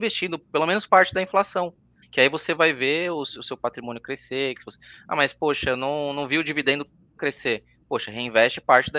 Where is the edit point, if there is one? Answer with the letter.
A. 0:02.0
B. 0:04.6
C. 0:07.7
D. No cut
A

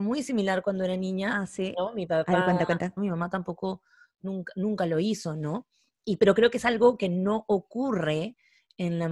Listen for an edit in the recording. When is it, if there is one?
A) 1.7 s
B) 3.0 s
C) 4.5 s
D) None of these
B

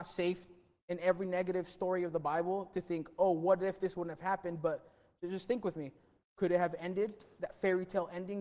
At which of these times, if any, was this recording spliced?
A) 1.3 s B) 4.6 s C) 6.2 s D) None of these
C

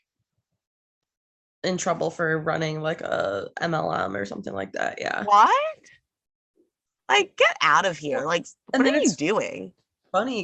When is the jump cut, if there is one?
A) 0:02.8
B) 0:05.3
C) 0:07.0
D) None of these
C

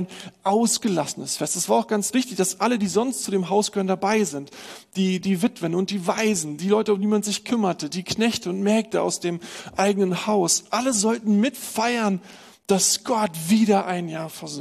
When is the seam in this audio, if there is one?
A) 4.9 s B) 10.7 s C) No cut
C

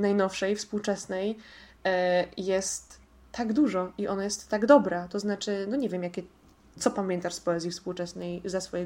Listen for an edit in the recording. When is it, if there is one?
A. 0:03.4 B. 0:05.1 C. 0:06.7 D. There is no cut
B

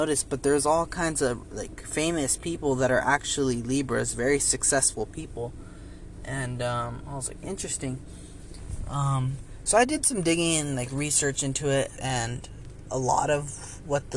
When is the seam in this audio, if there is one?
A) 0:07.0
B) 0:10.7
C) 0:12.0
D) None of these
C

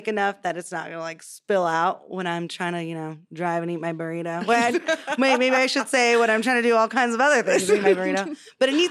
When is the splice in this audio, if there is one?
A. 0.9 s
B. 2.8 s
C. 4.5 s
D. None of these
D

